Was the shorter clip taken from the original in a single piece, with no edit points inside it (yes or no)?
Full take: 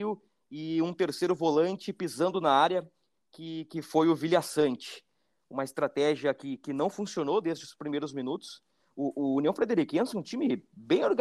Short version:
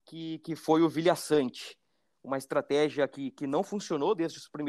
yes